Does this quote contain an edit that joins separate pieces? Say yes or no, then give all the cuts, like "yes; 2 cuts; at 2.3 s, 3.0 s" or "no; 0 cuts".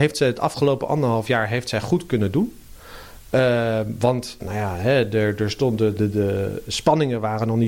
yes; 2 cuts; at 4.4 s, 6.0 s